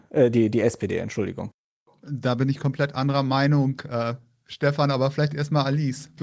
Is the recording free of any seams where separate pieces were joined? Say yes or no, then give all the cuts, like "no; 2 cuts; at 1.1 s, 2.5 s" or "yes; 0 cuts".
yes; 0 cuts